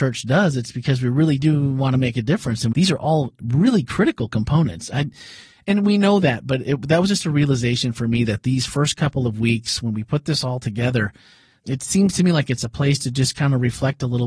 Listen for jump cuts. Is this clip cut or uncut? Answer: uncut